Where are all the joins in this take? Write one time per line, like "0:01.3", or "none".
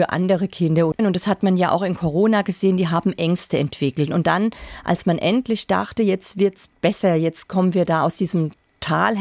0:01.0